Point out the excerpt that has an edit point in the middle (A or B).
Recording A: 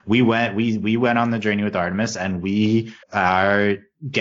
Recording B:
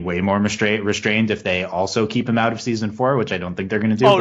A